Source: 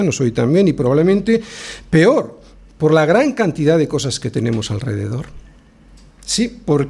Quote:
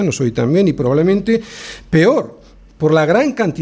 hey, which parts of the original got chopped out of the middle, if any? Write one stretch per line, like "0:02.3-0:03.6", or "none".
none